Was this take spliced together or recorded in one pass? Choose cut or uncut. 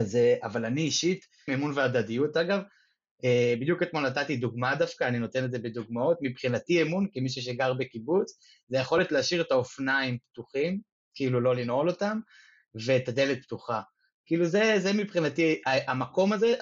cut